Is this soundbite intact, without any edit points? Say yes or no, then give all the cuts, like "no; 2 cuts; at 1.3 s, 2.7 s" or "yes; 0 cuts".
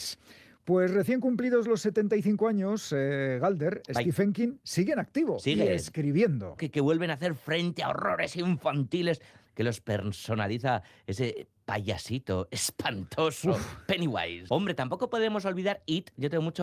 no; 2 cuts; at 6.6 s, 14.5 s